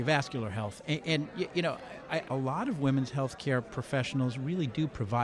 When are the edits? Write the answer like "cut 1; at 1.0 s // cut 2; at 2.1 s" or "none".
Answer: cut 1; at 2.3 s